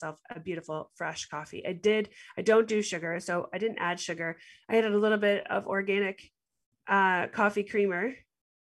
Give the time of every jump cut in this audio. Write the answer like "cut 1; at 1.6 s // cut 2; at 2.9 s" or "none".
none

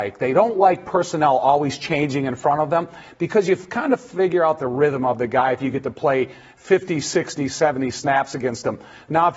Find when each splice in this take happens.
none

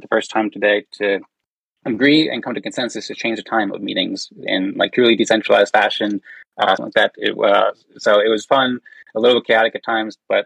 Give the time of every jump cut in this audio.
cut 1; at 6.8 s

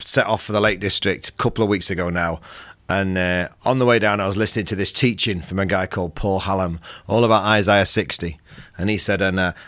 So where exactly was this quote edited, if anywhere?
none

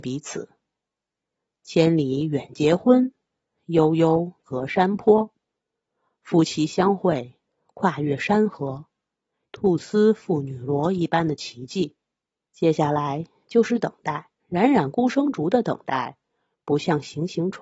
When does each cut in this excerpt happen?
cut 1; at 9.4 s // cut 2; at 12.5 s // cut 3; at 14.4 s

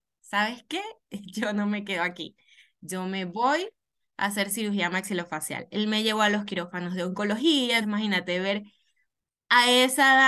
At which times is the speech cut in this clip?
cut 1; at 7.8 s

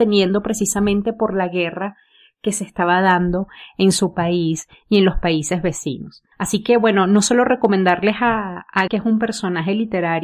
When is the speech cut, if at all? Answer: cut 1; at 6.3 s // cut 2; at 8.9 s

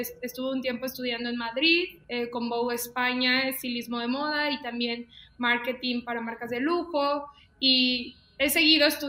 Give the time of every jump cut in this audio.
cut 1; at 2.0 s

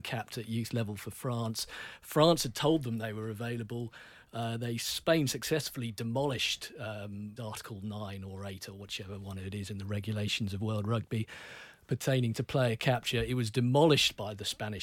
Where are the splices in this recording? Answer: cut 1; at 7.4 s

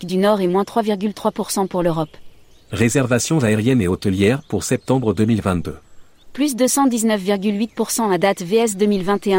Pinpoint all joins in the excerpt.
cut 1; at 2.7 s // cut 2; at 6.2 s

